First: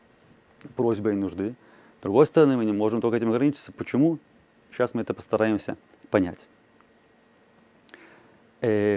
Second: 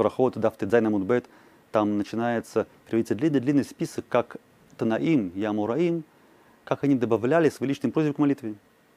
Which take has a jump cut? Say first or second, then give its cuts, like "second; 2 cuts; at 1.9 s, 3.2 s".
first; 1 cut; at 3.7 s